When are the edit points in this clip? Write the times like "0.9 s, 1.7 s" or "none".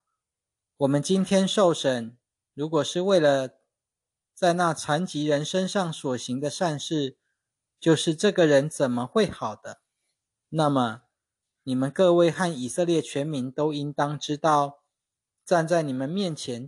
none